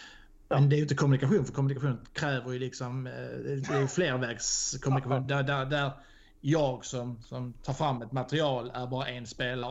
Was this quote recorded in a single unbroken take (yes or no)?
yes